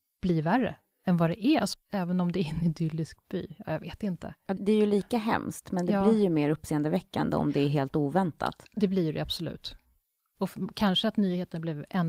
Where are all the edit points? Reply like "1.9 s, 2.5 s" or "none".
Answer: 1.7 s, 4.6 s